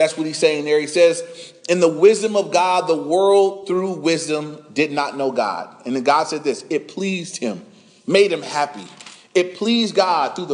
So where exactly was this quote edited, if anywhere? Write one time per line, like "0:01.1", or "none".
none